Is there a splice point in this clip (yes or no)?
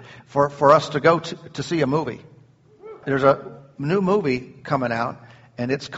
yes